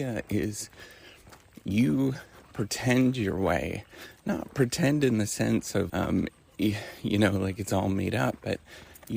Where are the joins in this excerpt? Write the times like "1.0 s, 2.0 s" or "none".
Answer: 5.9 s

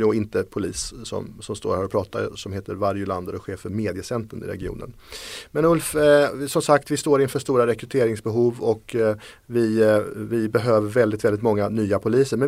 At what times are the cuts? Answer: none

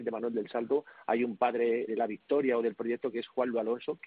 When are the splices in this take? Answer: 1.9 s

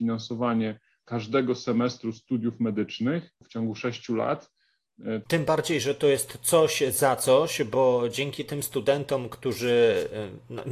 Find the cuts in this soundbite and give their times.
5.2 s

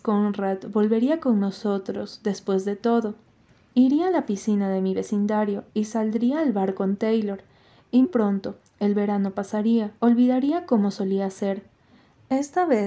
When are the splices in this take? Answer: 3.7 s, 8.0 s, 10.0 s

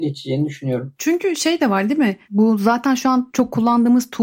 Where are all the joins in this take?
2.2 s

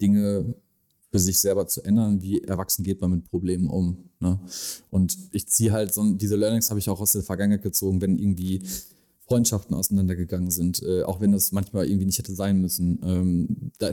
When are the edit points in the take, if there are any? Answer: none

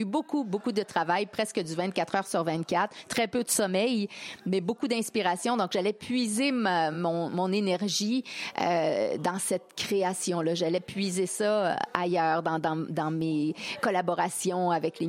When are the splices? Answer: none

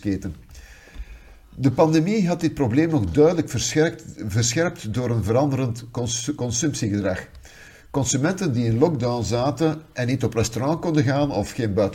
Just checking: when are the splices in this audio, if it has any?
none

